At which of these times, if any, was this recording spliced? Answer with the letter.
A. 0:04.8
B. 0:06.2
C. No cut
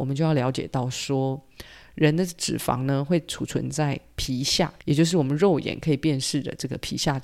A